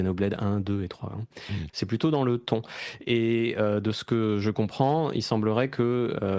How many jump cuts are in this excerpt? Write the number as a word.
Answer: one